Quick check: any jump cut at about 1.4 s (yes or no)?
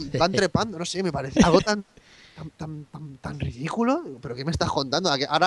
yes